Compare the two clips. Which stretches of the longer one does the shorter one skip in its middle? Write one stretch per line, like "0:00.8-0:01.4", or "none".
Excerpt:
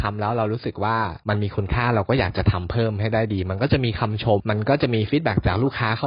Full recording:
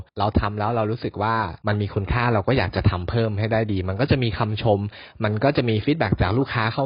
0:04.8-0:05.1